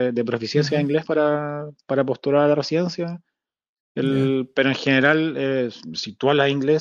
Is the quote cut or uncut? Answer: uncut